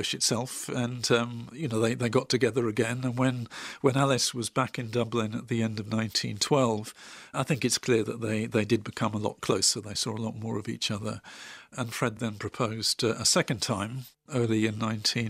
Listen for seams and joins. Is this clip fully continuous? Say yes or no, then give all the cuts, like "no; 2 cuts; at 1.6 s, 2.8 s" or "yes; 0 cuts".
yes; 0 cuts